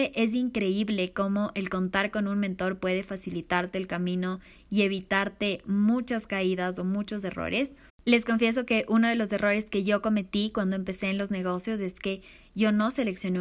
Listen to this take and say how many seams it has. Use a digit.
1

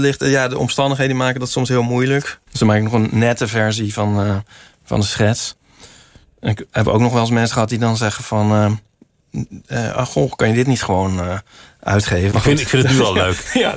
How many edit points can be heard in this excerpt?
2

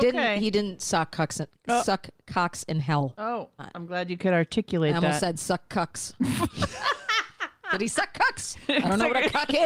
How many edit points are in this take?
1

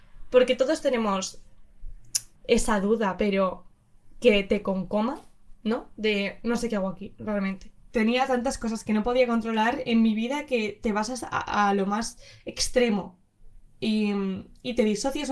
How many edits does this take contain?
1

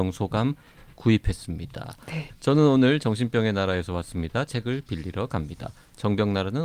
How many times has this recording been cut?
1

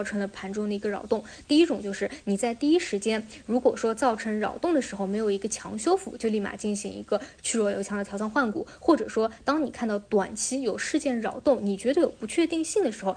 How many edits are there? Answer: 1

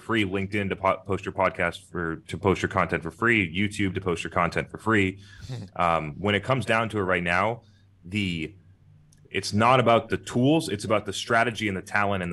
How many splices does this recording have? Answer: 0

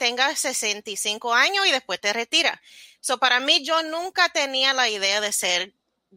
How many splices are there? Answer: 0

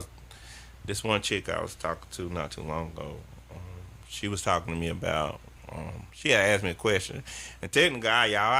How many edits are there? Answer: 0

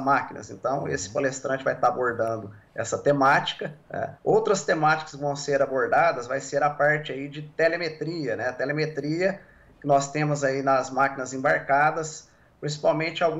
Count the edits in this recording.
1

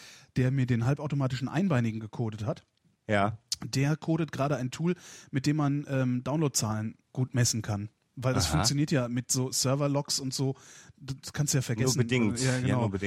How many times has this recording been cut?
1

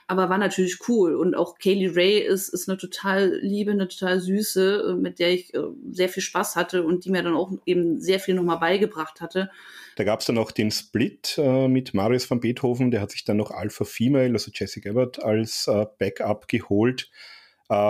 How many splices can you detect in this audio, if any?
1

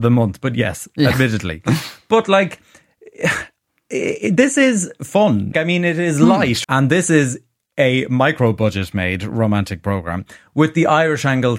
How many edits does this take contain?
2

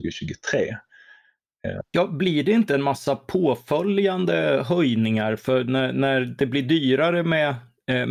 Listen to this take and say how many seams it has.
0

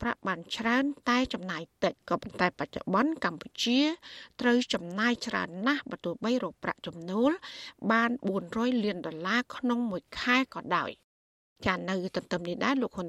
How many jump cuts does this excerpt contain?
1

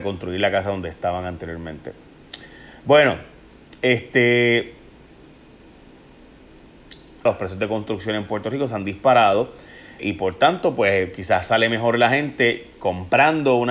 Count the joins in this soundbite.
2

